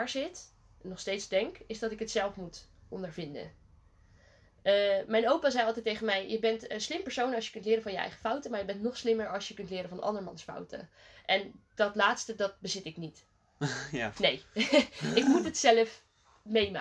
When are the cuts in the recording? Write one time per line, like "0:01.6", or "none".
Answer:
none